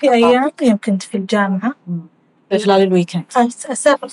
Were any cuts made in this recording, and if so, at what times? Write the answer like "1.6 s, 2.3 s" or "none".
2.5 s